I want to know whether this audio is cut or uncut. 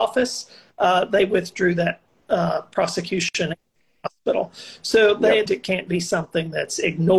cut